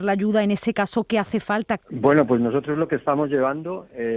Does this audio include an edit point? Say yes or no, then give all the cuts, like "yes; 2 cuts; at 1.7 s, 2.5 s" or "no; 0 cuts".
yes; 1 cut; at 1.8 s